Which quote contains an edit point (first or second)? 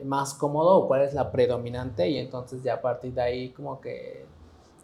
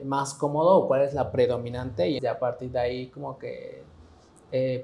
second